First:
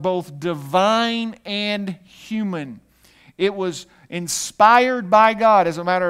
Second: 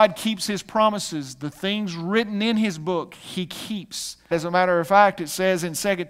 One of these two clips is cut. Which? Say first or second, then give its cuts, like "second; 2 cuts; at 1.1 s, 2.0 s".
second; 1 cut; at 4.3 s